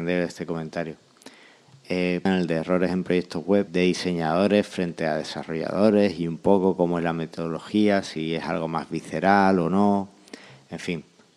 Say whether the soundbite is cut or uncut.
cut